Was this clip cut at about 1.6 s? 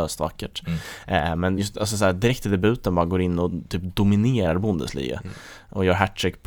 no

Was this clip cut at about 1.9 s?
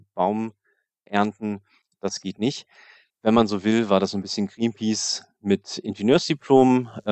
no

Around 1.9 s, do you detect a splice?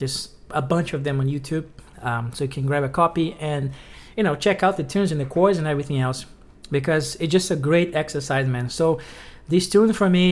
yes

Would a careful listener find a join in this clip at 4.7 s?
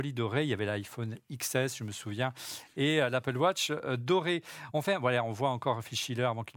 no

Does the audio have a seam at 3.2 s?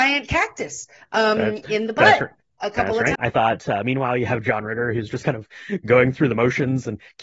yes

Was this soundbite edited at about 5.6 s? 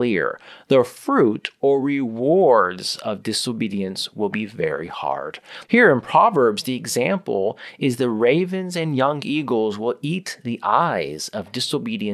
yes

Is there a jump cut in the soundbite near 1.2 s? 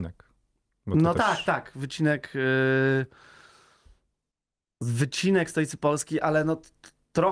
no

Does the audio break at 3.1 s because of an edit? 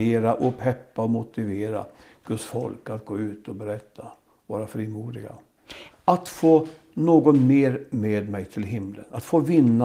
no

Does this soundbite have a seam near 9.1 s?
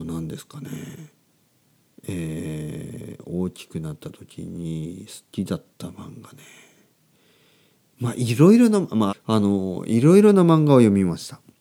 yes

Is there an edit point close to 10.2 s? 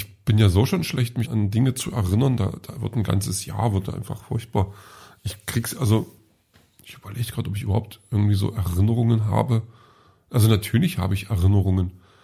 no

